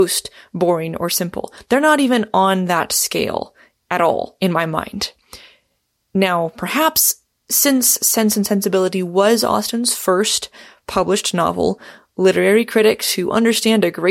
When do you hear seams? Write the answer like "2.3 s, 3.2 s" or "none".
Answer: none